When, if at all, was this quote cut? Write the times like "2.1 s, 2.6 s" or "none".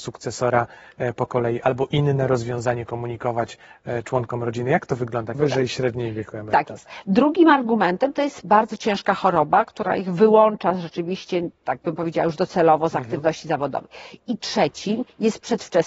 5.3 s